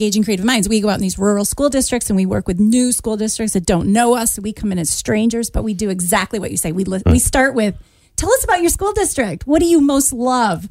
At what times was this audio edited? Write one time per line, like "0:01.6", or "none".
none